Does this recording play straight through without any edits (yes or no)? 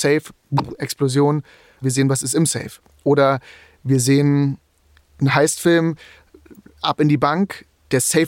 no